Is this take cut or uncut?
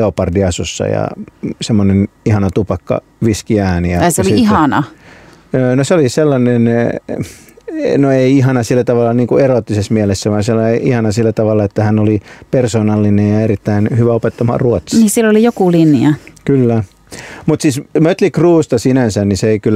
uncut